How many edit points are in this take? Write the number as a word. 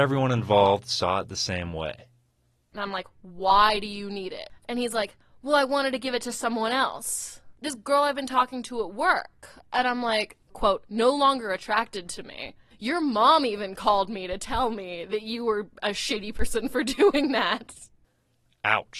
one